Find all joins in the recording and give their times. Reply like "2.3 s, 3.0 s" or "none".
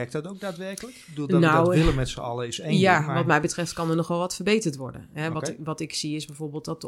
none